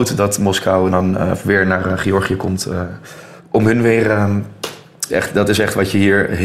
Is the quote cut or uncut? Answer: cut